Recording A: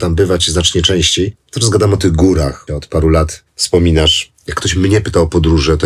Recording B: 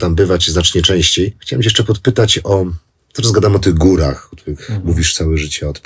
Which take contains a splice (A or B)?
A